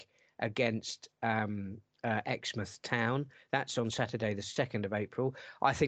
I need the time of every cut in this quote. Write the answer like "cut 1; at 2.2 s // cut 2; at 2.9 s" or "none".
none